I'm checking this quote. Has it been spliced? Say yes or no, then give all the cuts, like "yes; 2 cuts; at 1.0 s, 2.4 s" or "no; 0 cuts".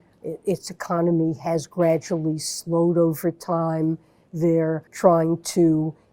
yes; 1 cut; at 4.9 s